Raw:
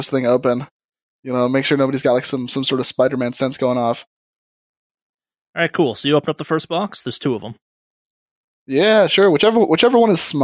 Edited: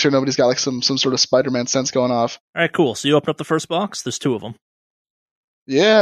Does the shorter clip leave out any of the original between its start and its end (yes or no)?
yes